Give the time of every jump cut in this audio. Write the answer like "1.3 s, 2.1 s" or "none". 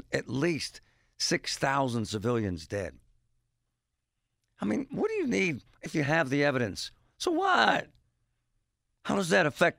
5.9 s